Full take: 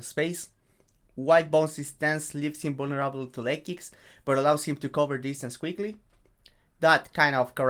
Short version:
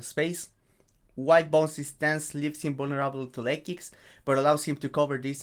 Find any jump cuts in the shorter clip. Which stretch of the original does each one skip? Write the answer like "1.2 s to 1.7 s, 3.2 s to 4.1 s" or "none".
none

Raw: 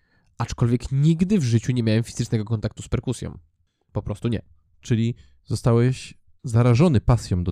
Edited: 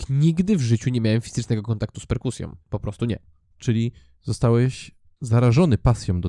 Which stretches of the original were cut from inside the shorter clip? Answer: 3.4 s to 3.8 s

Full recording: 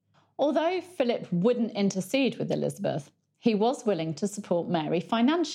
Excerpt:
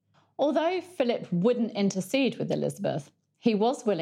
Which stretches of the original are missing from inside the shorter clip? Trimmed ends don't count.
none

